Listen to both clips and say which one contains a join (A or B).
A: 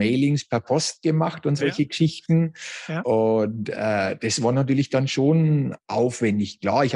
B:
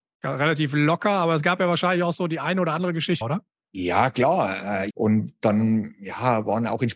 B